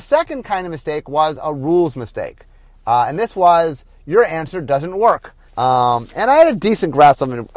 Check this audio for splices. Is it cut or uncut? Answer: cut